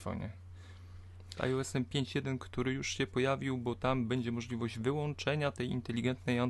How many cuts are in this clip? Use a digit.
1